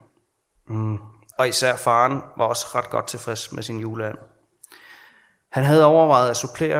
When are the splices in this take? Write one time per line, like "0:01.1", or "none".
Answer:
0:01.3